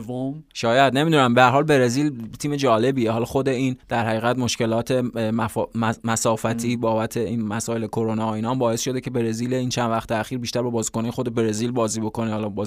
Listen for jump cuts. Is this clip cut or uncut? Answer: cut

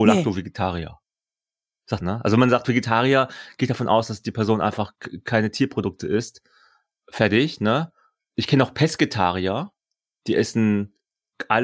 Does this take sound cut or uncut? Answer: cut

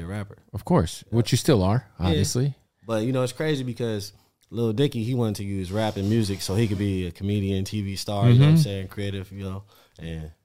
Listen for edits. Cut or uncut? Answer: uncut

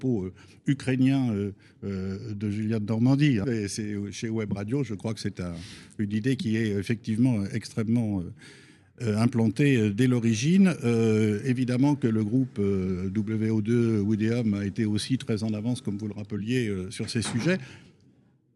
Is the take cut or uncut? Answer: cut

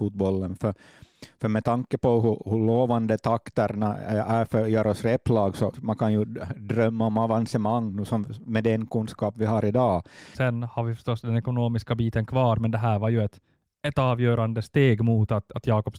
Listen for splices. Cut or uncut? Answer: cut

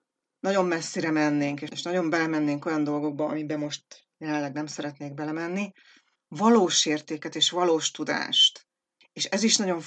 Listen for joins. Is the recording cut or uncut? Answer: cut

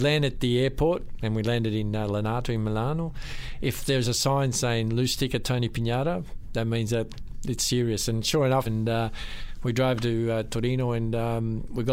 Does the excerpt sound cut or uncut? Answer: cut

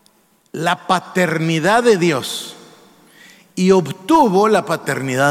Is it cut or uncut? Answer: uncut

